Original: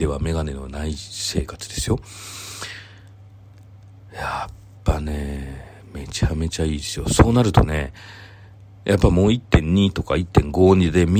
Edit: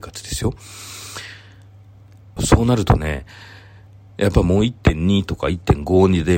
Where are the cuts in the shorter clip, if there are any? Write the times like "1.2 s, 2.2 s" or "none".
2.4 s